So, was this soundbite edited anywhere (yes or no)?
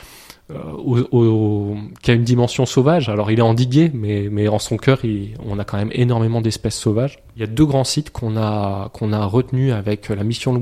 no